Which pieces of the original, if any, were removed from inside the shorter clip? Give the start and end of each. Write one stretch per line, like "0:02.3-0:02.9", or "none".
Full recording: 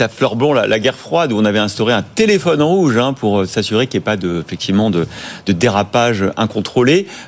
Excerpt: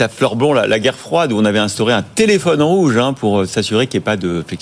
none